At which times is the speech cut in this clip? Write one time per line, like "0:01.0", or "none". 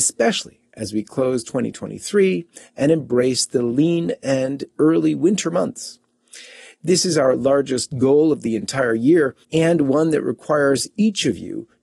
0:09.4